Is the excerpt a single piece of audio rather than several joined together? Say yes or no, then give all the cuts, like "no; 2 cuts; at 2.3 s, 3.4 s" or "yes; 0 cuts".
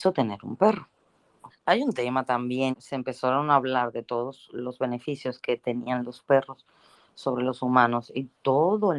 no; 2 cuts; at 1.5 s, 2.7 s